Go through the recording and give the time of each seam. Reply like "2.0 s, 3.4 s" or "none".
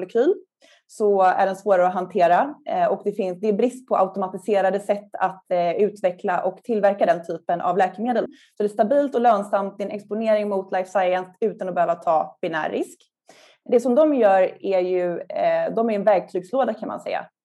8.3 s